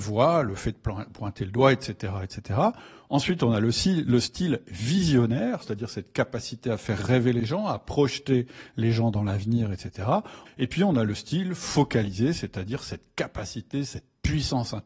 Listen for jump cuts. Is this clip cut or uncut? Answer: cut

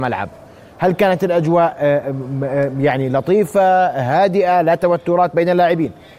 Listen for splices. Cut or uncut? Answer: uncut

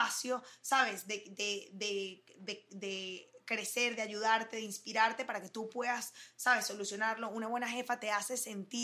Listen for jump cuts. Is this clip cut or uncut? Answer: uncut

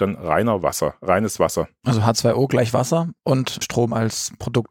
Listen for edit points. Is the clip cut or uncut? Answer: cut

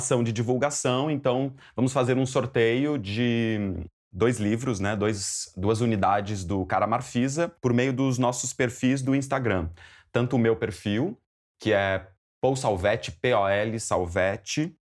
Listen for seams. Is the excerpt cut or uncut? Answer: uncut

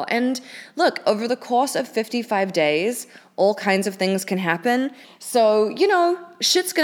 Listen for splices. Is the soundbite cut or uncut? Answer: cut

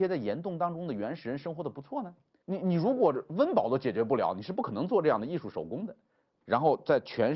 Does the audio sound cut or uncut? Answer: cut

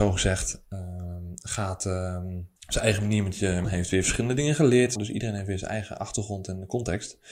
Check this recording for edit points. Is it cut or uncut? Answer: cut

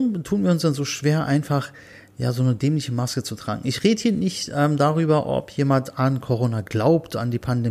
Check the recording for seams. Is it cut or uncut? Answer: uncut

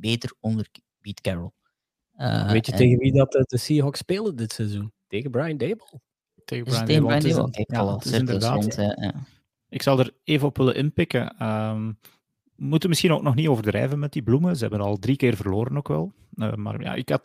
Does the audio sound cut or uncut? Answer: cut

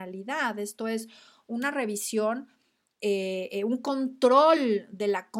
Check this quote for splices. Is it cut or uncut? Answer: uncut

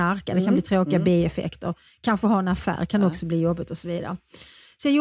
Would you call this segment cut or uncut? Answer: uncut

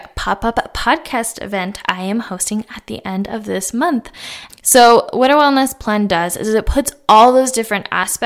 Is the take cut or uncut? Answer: cut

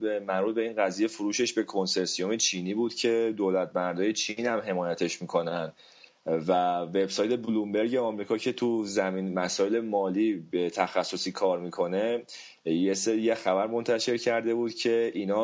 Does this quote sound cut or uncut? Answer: uncut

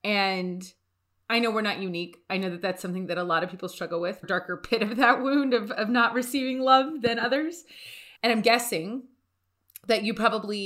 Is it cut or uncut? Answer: cut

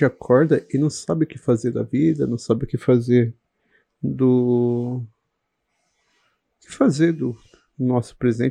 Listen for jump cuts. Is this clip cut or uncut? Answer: uncut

